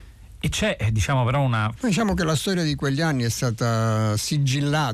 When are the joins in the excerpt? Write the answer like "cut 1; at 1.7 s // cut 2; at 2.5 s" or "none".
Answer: cut 1; at 1.8 s